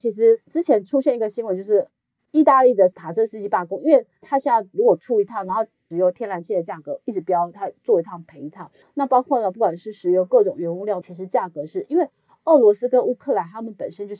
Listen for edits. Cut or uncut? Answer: cut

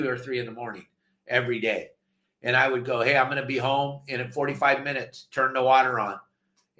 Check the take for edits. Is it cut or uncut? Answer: uncut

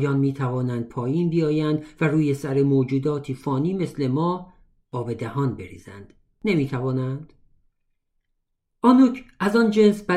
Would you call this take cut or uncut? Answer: uncut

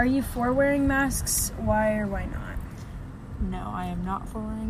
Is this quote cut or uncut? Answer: uncut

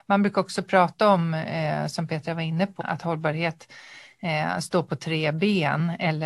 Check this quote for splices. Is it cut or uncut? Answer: cut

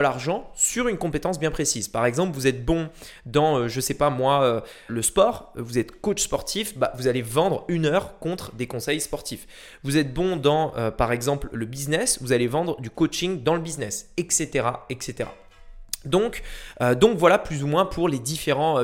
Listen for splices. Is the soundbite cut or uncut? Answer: cut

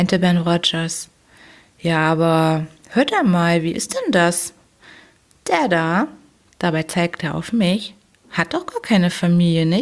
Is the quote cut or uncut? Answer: uncut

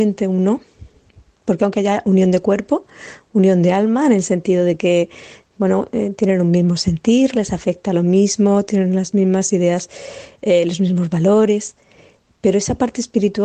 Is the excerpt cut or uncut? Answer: cut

